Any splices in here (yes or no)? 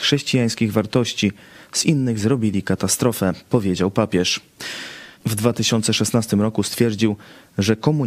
yes